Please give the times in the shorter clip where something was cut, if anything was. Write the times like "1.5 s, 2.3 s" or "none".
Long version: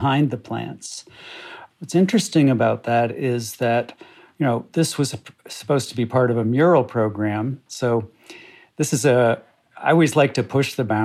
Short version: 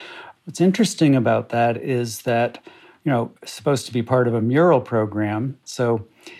3.4 s

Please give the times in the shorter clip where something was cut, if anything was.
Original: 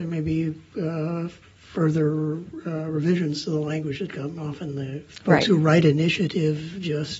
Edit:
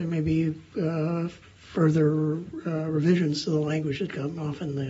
none

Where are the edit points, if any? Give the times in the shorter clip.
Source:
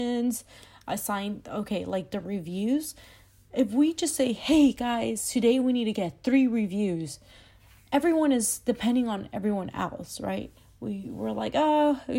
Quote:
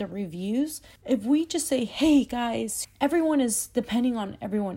1.0 s, 2.8 s

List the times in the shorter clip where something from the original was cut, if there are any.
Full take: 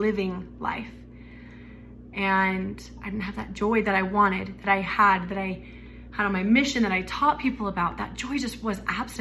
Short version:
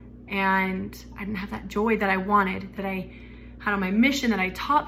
2.8 s

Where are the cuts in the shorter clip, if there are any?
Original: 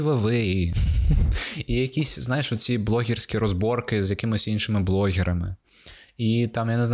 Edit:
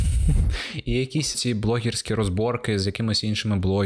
1.3 s

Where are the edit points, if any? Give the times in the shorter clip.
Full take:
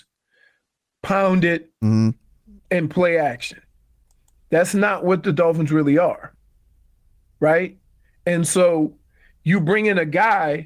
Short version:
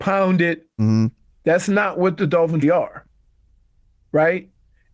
1.3 s, 2.6 s

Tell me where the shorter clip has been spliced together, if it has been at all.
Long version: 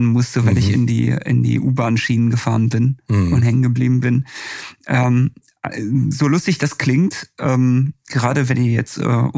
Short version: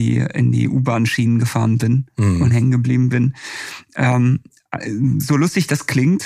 none

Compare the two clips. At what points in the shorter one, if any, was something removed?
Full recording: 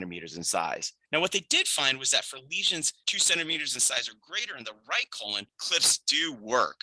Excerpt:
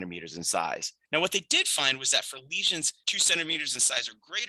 none

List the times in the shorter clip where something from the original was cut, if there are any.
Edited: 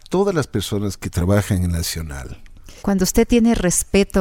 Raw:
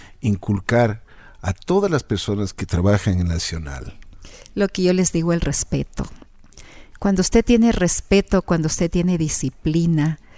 2.8 s

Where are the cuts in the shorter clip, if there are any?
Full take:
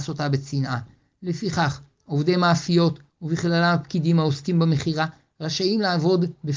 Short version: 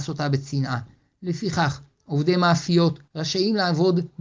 3.1 s

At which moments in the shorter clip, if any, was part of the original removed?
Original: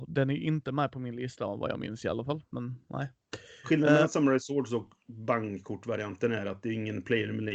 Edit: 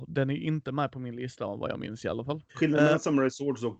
2.5 s

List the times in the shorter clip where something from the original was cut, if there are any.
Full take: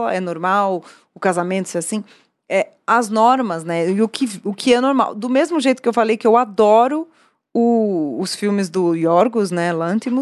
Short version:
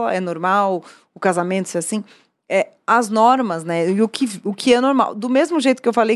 none

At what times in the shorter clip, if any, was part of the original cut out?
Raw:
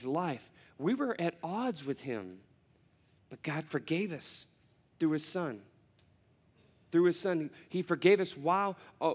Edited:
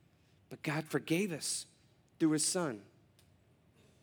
none

